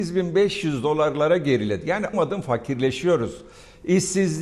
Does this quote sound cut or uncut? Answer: cut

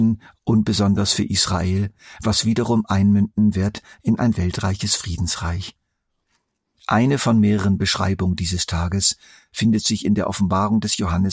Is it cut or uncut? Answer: uncut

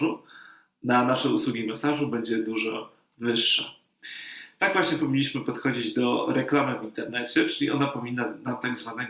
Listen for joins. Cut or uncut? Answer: uncut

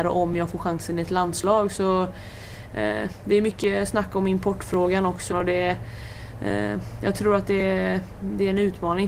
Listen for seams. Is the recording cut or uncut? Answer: cut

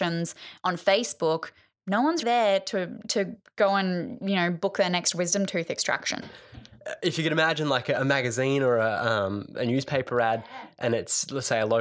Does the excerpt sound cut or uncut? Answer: cut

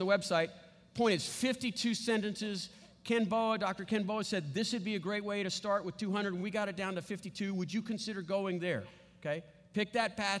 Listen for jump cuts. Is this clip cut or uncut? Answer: uncut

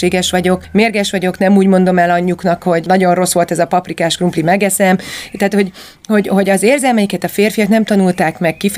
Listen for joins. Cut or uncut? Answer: uncut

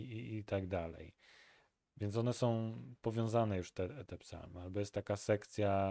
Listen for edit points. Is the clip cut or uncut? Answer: cut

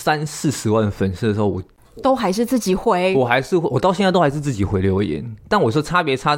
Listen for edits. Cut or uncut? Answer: uncut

